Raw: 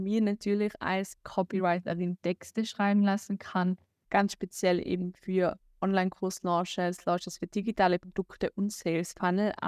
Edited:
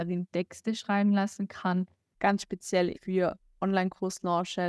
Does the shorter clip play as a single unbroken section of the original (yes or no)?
no